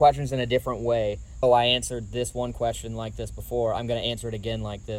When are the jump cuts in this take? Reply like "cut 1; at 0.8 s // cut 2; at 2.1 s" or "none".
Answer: cut 1; at 1.4 s